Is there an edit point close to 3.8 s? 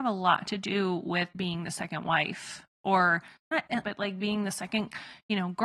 yes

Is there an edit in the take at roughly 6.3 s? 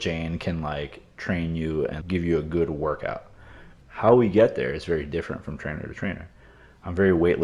no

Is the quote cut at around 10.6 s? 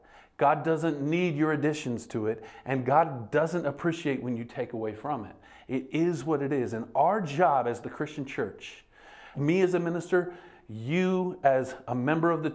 no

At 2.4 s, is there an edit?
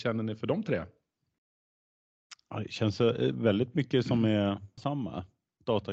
no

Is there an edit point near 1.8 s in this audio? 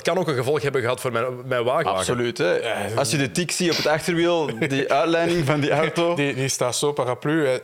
yes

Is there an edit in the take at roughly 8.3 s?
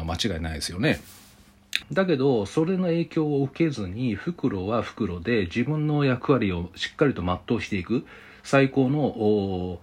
no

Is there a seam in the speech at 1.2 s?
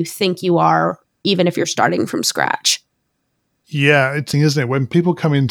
no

